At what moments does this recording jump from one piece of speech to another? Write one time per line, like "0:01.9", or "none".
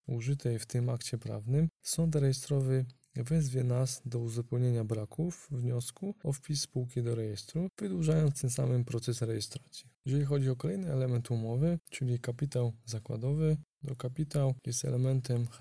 0:10.0